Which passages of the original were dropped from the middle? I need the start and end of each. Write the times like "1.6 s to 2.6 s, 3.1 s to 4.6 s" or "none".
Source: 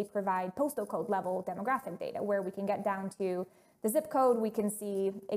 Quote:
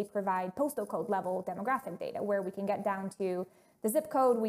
none